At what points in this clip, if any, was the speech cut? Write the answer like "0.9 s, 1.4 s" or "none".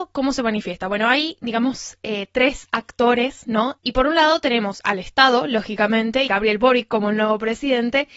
3.8 s, 6.3 s